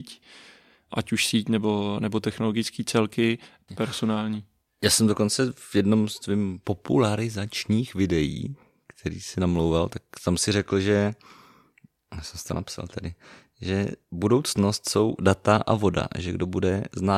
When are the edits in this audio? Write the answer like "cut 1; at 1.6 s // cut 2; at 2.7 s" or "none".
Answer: cut 1; at 3.7 s